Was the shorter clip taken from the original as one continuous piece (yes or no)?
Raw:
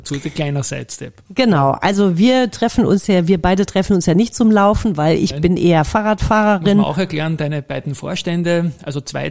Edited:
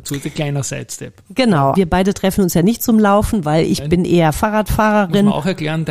no